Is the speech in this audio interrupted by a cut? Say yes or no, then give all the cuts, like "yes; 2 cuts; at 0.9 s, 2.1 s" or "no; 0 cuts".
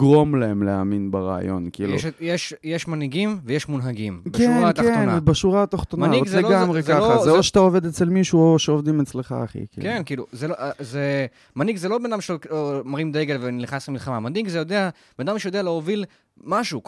no; 0 cuts